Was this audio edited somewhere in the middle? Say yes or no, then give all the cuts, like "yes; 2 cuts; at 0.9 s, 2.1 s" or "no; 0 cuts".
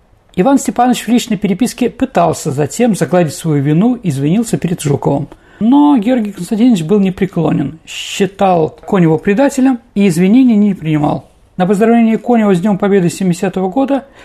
no; 0 cuts